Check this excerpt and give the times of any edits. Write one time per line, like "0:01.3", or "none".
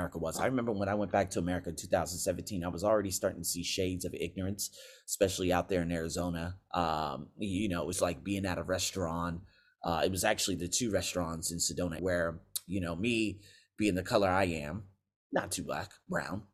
0:07.9
0:12.0